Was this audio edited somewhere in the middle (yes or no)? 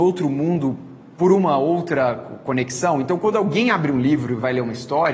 no